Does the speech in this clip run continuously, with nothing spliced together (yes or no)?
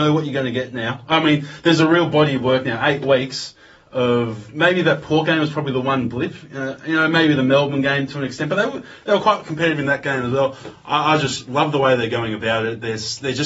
yes